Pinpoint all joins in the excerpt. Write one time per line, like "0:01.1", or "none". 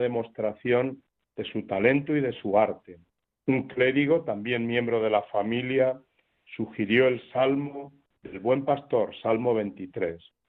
0:03.3